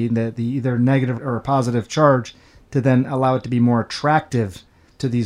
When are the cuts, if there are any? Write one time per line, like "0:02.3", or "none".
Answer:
none